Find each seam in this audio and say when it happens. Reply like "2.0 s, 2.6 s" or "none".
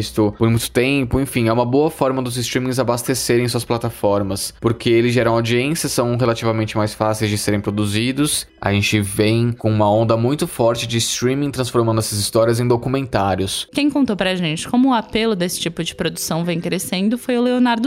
8.5 s, 13.7 s